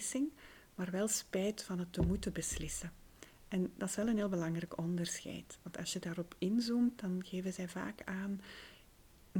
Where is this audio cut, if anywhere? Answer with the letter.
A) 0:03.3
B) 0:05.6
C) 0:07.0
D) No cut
D